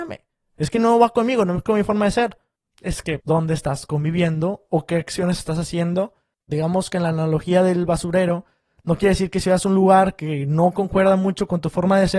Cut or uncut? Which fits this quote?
cut